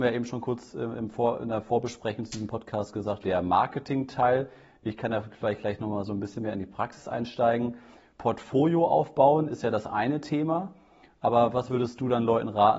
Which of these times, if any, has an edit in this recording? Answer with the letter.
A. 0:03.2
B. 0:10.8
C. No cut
A